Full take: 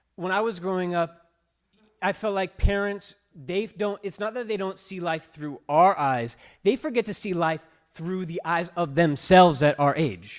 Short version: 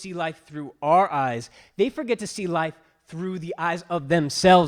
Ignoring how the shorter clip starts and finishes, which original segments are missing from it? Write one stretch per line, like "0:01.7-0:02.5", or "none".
none